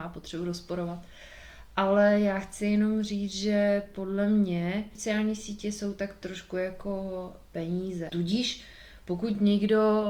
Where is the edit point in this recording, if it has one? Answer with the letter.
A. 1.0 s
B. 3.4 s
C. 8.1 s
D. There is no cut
C